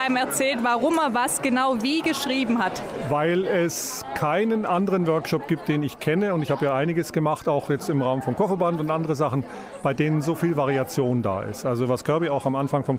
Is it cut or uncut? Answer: uncut